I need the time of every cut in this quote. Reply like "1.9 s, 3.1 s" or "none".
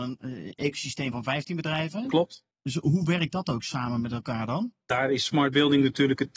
none